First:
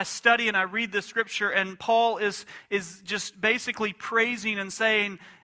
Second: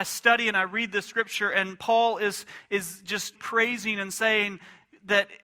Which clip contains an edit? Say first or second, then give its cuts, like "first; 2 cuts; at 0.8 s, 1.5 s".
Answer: second; 1 cut; at 3.3 s